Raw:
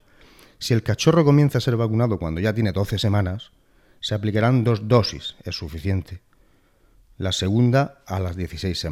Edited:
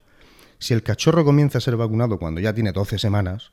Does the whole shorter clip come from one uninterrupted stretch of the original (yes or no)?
yes